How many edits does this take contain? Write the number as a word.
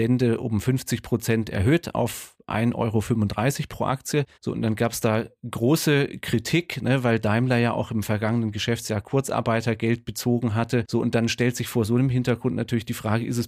one